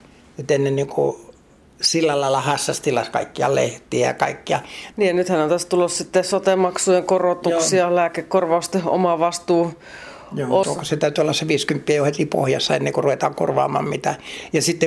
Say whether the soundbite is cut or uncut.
cut